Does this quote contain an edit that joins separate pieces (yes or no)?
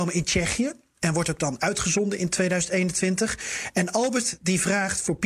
no